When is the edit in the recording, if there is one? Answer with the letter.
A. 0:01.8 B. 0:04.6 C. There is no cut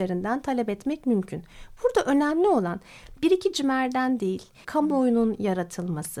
B